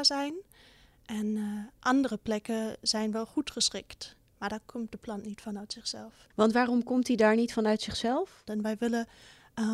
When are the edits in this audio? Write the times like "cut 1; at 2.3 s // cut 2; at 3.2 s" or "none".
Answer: cut 1; at 8.5 s